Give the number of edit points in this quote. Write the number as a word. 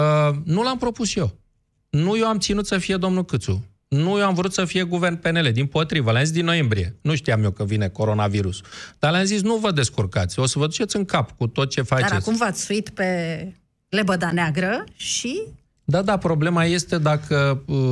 zero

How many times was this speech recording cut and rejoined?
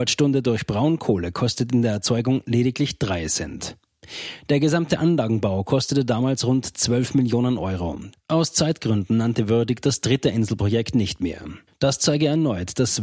two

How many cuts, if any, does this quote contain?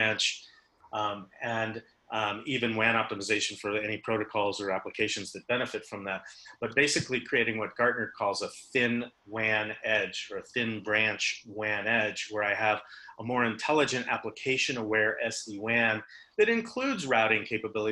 one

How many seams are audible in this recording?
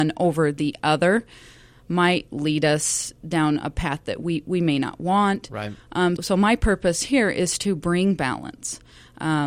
one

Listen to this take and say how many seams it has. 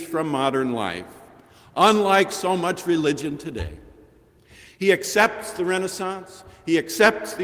zero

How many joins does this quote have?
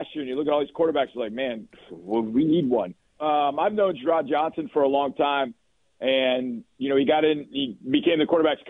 one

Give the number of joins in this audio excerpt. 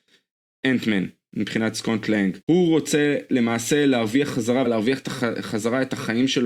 two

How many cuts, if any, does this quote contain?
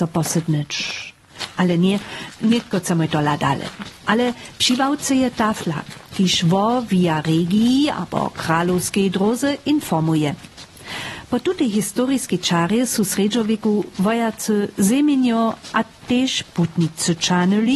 one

